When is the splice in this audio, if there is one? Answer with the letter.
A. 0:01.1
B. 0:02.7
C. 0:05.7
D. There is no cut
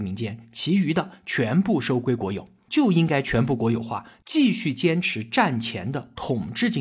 B